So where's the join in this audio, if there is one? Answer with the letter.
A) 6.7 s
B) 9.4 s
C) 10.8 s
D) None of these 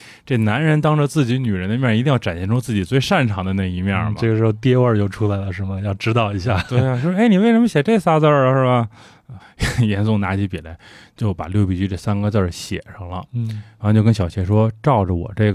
B